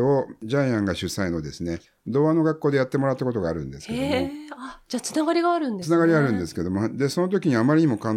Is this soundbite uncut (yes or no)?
yes